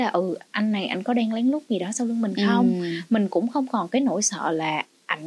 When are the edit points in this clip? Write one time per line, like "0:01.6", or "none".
none